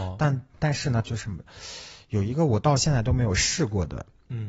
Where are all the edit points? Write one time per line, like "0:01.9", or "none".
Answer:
0:01.0